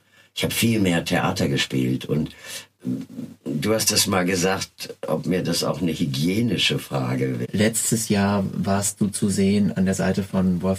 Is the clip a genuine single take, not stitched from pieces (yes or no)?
no